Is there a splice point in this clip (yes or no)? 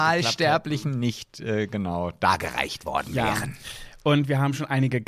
no